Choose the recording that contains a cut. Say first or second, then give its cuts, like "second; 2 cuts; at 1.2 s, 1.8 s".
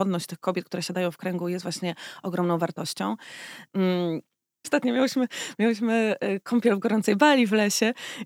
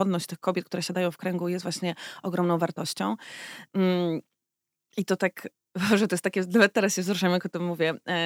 first; 1 cut; at 4.6 s